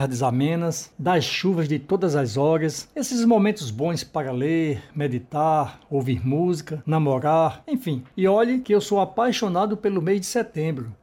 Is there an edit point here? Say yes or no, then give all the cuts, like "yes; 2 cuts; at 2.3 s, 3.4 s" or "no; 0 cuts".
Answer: no; 0 cuts